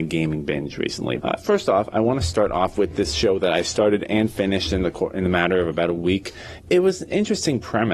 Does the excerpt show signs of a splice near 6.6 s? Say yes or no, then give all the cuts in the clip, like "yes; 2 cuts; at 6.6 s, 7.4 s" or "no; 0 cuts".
yes; 2 cuts; at 1.2 s, 6.6 s